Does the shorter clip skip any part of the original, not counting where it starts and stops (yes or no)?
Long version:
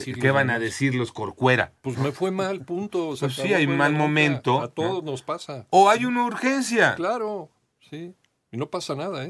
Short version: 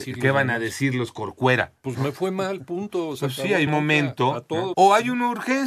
yes